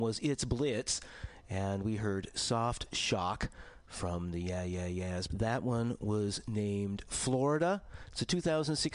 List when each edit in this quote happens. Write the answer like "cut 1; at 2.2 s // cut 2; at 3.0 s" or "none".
cut 1; at 5.3 s